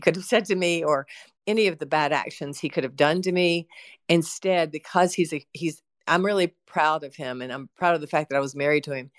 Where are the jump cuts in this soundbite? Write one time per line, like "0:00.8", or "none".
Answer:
none